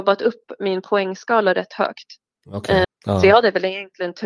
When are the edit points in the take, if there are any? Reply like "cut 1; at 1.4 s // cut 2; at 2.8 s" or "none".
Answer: cut 1; at 2.8 s